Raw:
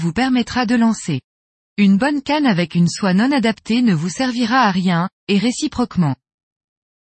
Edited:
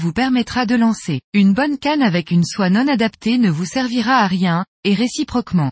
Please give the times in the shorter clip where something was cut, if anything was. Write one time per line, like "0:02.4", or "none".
0:01.2